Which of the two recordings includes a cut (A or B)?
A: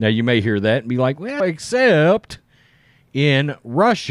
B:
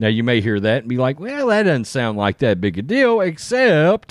A